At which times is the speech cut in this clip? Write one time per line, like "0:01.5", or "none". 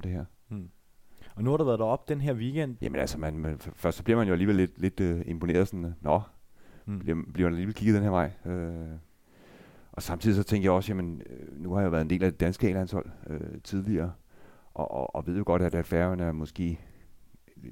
0:02.8